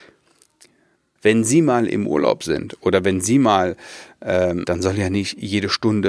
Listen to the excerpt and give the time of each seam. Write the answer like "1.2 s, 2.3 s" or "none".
1.2 s, 4.6 s